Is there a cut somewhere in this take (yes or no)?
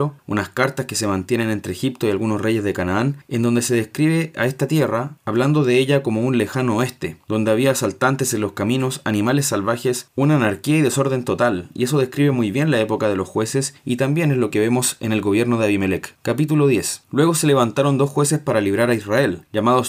no